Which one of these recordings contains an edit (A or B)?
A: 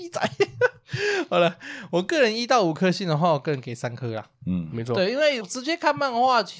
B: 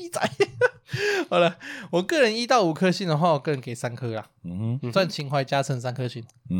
A